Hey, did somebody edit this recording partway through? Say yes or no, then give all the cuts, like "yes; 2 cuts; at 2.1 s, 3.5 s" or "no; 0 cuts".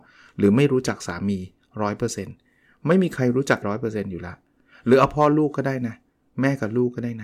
yes; 1 cut; at 3.6 s